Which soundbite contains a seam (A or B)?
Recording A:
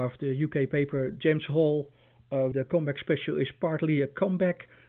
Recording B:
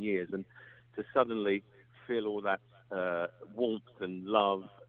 A